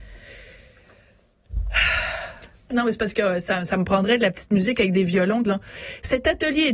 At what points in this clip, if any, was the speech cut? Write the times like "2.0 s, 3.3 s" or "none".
2.7 s, 5.4 s